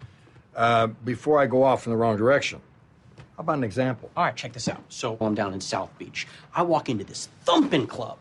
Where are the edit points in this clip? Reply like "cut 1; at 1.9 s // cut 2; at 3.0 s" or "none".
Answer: cut 1; at 3.3 s // cut 2; at 5.2 s